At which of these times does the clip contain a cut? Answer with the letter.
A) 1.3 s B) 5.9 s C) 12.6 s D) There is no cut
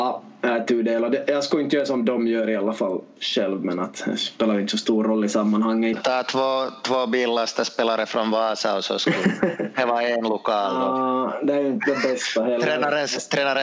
B